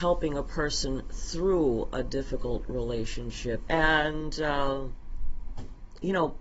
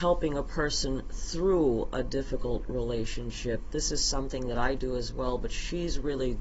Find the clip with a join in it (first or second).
first